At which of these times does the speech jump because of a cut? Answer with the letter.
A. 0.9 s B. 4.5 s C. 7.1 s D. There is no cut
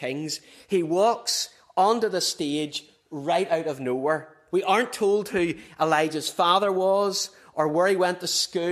B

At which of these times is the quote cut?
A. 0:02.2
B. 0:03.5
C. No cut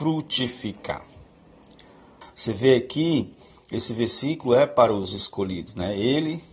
A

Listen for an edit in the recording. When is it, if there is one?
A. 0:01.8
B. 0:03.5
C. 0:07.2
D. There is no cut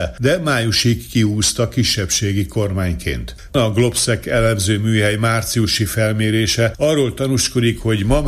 B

